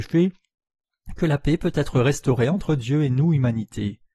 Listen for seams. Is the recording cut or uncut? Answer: uncut